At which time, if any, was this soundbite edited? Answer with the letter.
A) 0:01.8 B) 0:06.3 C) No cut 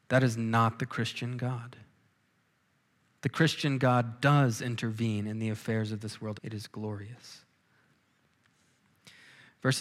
B